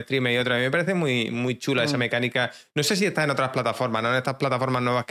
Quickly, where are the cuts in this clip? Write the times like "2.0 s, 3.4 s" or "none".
none